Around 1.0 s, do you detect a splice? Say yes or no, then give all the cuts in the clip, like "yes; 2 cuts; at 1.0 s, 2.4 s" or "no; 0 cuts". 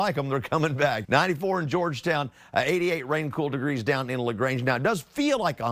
yes; 1 cut; at 1.0 s